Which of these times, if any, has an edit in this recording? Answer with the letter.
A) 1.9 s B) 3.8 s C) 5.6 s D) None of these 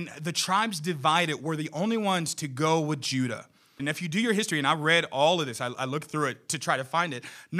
B